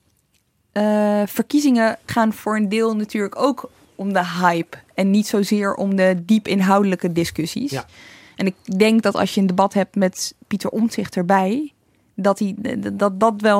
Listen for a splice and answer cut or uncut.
cut